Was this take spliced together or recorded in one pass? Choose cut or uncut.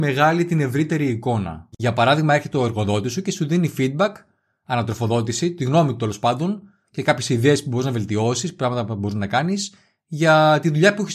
uncut